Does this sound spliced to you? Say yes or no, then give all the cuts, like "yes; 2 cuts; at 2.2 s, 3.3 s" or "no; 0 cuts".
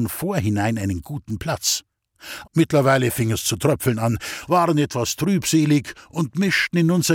yes; 2 cuts; at 2.4 s, 4.5 s